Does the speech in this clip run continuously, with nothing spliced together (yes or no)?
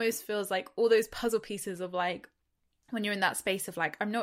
yes